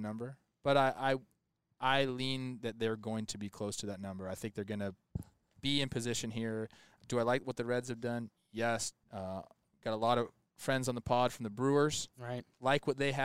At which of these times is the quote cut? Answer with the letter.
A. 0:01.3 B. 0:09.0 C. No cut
B